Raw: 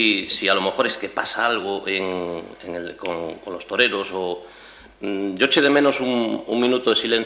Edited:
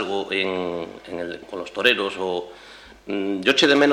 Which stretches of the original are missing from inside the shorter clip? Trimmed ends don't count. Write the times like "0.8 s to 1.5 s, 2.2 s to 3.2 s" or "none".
3.0 s to 3.4 s